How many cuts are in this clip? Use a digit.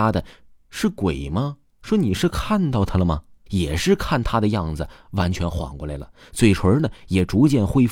1